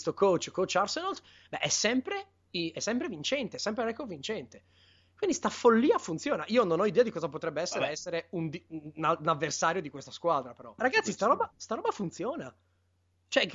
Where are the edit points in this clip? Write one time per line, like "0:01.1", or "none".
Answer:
0:10.8